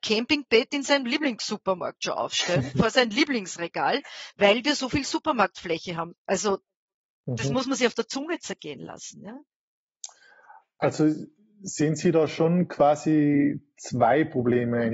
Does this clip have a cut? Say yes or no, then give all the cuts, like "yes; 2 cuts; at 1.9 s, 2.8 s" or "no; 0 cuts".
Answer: yes; 1 cut; at 6.1 s